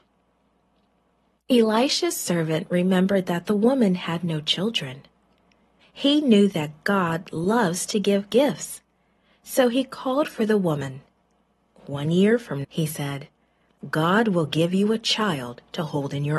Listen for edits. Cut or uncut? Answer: cut